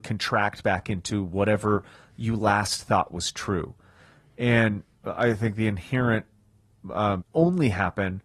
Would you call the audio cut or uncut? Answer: cut